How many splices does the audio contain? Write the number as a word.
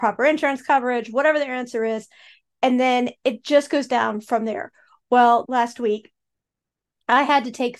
one